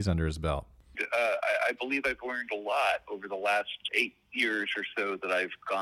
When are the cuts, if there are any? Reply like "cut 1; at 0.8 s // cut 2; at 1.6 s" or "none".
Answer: cut 1; at 0.9 s // cut 2; at 3.9 s

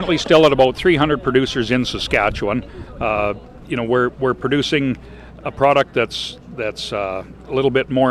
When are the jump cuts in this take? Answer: none

